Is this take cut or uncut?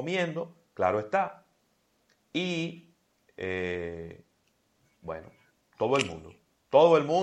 uncut